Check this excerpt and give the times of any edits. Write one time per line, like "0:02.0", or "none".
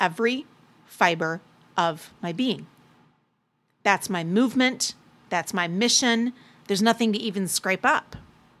0:06.6